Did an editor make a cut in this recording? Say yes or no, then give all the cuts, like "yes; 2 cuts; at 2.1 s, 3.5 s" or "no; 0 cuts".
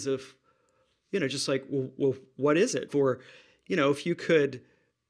yes; 1 cut; at 2.9 s